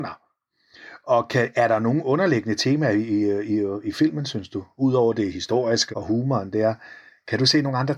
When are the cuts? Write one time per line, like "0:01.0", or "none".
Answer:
0:05.9